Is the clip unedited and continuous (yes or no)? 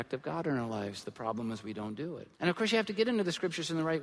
no